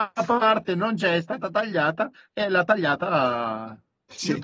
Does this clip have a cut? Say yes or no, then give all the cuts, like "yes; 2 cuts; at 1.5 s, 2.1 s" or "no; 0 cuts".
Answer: no; 0 cuts